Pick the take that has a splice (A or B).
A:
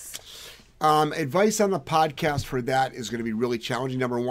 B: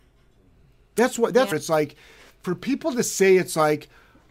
B